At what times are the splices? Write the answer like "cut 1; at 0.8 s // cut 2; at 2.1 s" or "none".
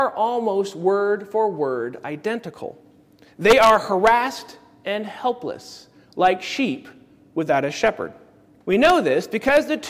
cut 1; at 3.3 s // cut 2; at 8.6 s

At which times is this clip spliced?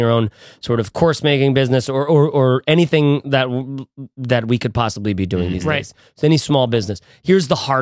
none

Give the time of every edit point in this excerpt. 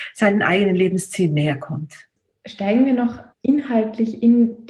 cut 1; at 3.3 s

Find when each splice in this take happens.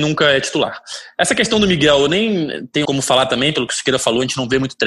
cut 1; at 2.8 s

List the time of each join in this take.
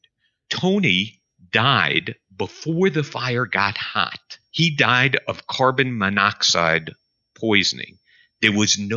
none

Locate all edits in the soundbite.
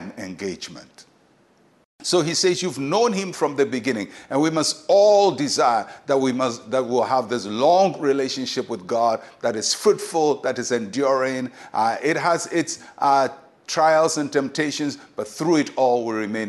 none

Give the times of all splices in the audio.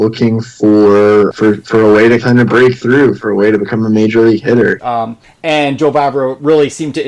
cut 1; at 1.3 s // cut 2; at 4.8 s

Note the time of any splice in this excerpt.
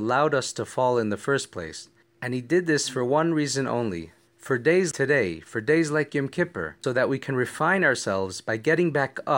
cut 1; at 4.9 s // cut 2; at 6.8 s

